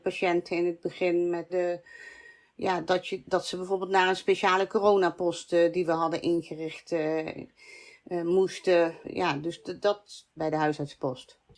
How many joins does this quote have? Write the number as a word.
three